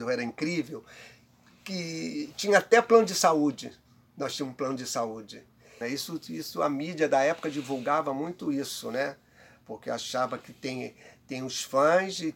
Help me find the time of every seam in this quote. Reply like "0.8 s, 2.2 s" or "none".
5.8 s